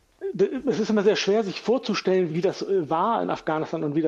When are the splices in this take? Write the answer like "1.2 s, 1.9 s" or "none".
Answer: 2.3 s